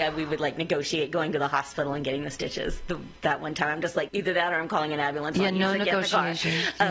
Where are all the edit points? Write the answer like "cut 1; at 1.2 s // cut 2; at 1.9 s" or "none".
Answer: cut 1; at 4.1 s